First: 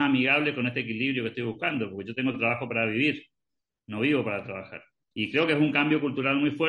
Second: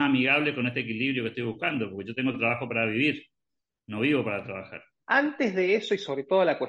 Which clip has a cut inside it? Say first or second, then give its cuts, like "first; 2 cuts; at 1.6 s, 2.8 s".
second; 1 cut; at 5.0 s